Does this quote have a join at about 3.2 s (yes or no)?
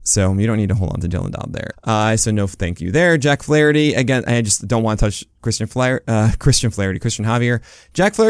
no